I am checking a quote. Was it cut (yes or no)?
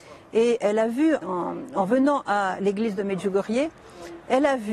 yes